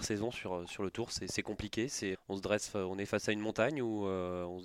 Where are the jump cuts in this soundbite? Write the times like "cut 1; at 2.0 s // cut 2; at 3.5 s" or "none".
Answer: cut 1; at 2.1 s